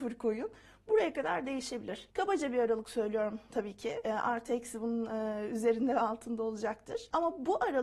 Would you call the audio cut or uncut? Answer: uncut